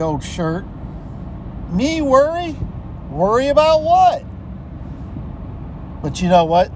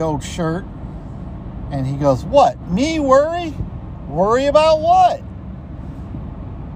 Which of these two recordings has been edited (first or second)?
first